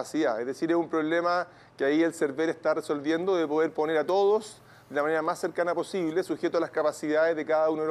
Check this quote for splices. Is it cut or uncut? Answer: uncut